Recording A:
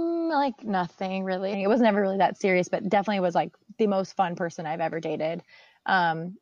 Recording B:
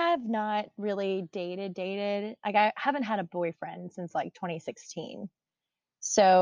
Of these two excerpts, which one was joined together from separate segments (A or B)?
A